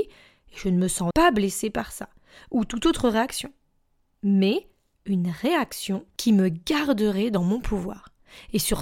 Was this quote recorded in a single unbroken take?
no; 1 cut; at 1.1 s

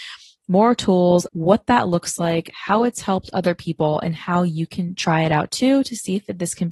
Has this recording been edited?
yes; 1 cut; at 1.3 s

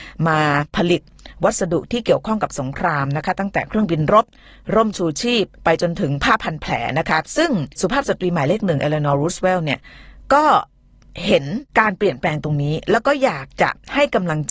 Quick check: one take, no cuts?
no; 1 cut; at 5.5 s

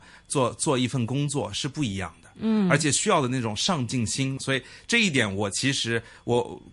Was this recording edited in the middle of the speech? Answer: yes; 1 cut; at 4.4 s

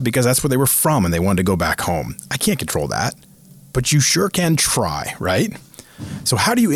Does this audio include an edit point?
no; 0 cuts

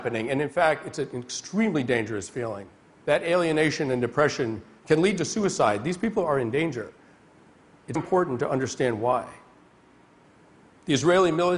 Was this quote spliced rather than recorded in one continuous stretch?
yes; 1 cut; at 8.0 s

